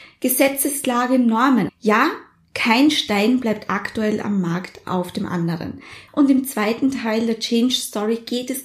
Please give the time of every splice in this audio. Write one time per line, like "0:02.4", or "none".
0:01.7
0:06.1